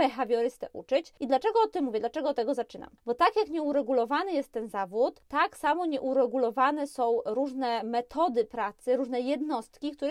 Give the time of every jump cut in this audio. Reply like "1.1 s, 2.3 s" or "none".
none

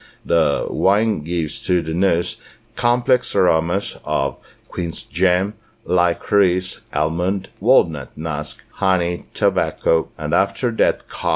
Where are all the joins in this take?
8.7 s, 10.1 s

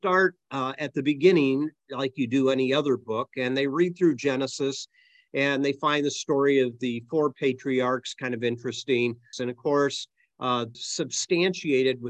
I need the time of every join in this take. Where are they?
9.3 s, 10.7 s

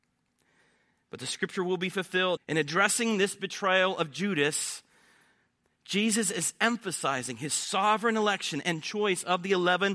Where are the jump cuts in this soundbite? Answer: 2.4 s

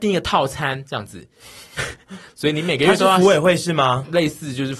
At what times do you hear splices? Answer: 2.3 s

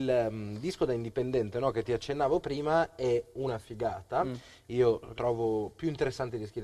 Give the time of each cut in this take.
5.1 s

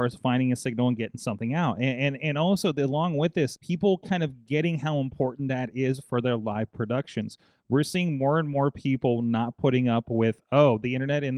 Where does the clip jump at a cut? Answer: 3.5 s

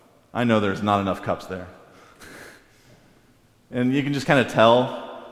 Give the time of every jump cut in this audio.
none

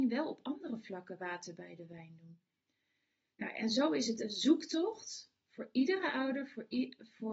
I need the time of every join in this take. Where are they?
none

